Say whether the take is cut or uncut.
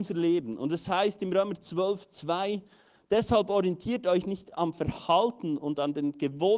uncut